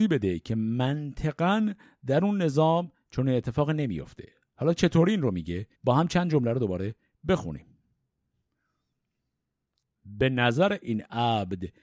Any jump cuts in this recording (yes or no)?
yes